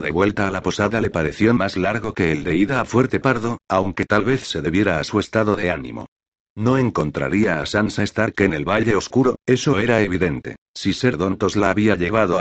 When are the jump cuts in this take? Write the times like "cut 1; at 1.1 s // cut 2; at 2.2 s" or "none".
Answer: cut 1; at 10.7 s